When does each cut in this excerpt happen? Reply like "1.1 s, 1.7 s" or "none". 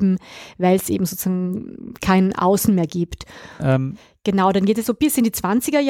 3.6 s, 4.8 s